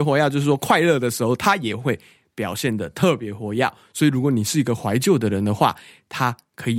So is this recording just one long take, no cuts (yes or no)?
yes